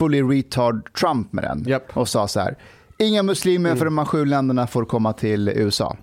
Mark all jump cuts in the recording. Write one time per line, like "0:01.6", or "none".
none